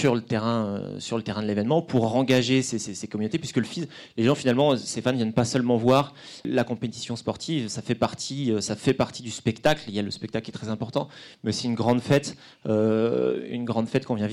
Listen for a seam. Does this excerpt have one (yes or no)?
no